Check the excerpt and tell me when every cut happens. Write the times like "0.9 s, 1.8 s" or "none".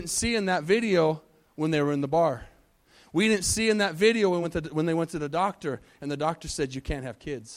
none